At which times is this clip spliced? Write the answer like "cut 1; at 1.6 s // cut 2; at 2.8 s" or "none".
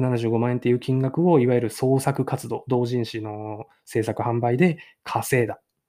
none